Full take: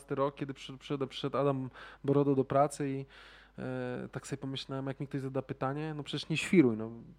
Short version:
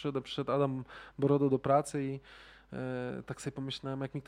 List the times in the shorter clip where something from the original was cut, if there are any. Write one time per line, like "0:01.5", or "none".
none